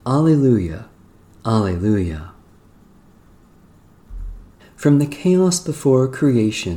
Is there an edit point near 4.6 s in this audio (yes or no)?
yes